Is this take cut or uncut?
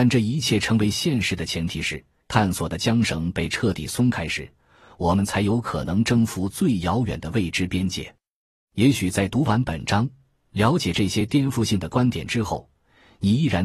cut